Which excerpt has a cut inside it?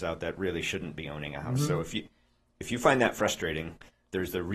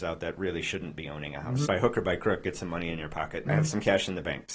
second; 2 cuts; at 1.7 s, 3.5 s

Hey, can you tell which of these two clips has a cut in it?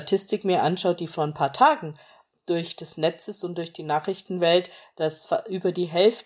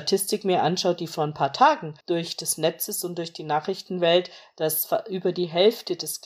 second; 1 cut; at 2.0 s

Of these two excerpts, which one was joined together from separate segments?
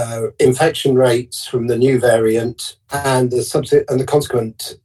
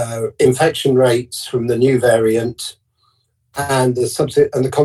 first; 1 cut; at 2.8 s

